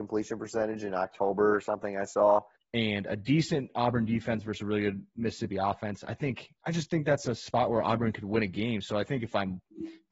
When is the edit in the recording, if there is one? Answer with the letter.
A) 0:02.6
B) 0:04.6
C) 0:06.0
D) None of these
A